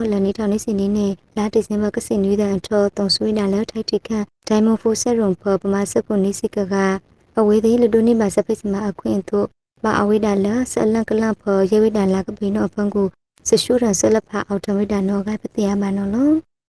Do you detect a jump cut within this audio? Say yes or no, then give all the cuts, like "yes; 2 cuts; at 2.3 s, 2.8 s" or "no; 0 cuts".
no; 0 cuts